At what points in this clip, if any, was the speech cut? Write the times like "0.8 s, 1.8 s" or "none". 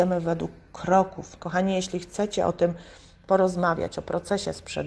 1.4 s